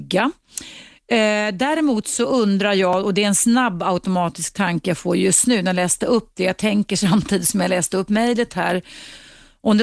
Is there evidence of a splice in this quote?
no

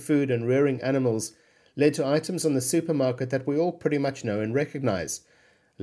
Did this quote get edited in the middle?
no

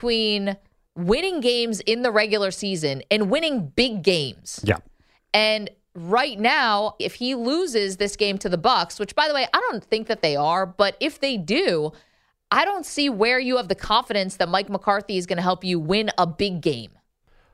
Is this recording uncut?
no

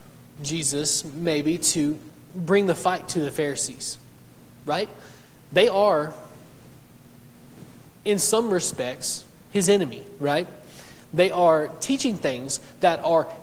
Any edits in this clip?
no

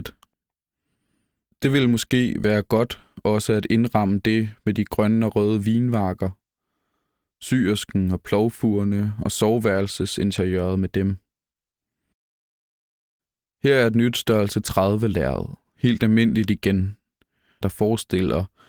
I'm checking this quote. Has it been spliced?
yes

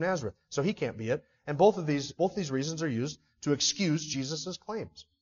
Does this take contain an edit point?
yes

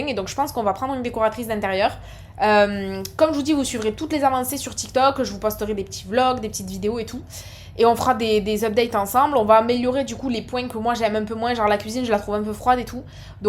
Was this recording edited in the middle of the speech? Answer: no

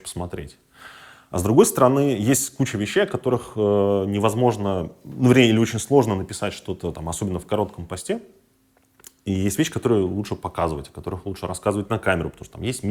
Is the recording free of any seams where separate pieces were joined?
yes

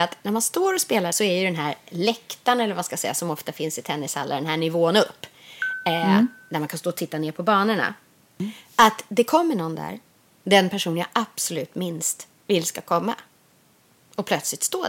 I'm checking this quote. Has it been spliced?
no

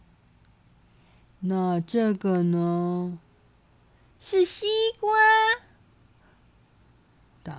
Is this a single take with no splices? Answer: no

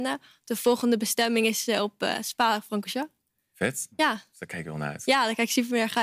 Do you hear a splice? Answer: no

